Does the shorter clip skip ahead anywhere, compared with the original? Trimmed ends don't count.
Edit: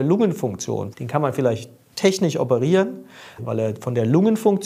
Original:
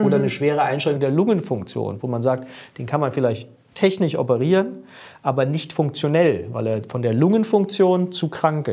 yes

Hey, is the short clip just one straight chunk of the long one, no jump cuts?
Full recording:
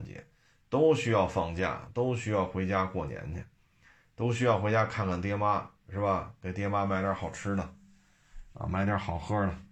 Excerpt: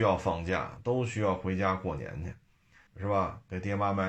no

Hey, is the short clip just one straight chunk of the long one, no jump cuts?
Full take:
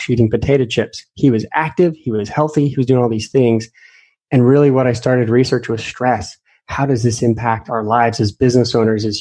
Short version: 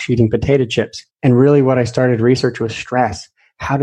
no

